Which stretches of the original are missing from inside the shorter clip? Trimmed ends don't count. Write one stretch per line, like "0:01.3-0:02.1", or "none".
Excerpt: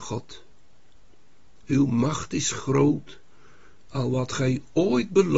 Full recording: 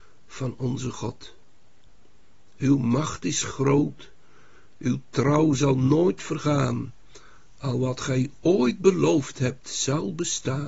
0:04.8-0:07.6